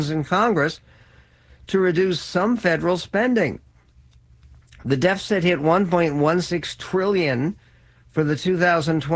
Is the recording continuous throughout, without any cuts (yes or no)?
yes